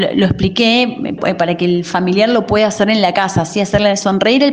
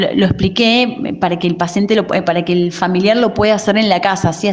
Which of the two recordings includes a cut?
first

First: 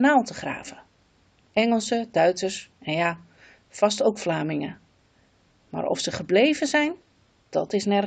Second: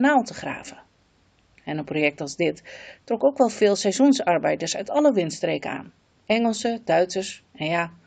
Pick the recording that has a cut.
first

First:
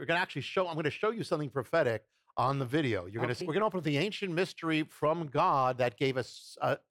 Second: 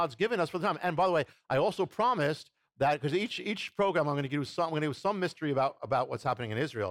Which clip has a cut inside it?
first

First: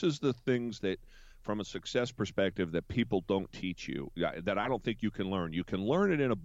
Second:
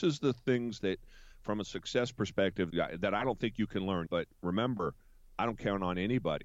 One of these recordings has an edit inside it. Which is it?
second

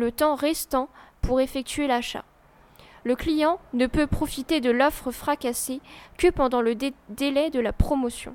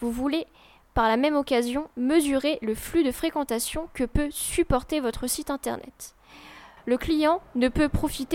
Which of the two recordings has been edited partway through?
second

